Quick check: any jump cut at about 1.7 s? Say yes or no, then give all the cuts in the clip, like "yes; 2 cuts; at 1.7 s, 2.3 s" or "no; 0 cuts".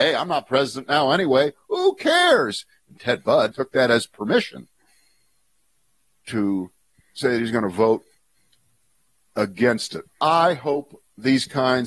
no; 1 cut; at 3.5 s